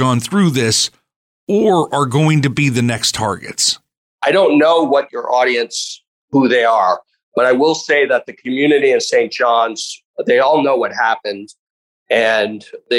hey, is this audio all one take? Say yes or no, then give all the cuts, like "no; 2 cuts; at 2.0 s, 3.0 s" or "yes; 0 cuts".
yes; 0 cuts